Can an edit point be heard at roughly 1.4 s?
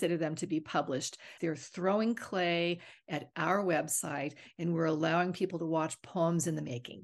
yes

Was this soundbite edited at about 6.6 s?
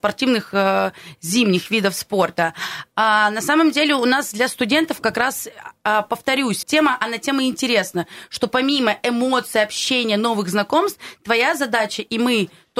yes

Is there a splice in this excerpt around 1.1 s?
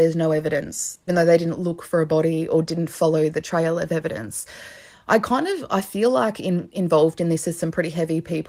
yes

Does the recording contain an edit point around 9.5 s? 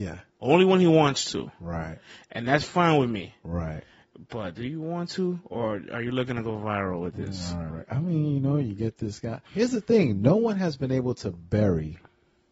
yes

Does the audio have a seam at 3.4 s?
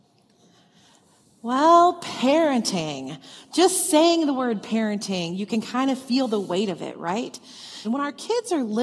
no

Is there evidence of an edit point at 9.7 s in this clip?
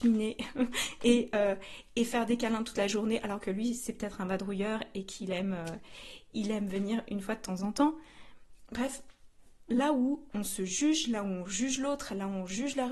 yes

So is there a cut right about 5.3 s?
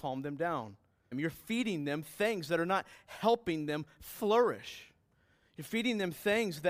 no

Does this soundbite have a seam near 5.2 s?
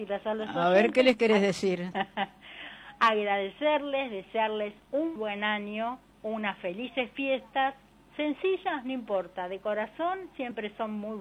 yes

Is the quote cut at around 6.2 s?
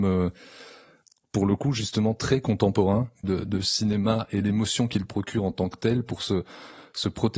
no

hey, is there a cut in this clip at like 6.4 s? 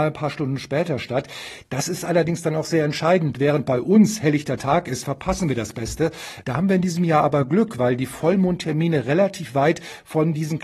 yes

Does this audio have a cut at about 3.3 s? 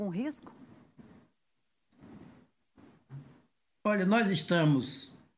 no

